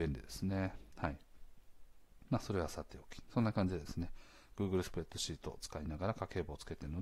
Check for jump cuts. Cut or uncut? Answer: cut